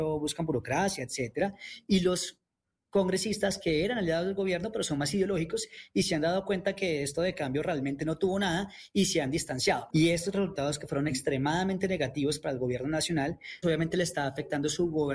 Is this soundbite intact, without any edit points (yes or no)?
no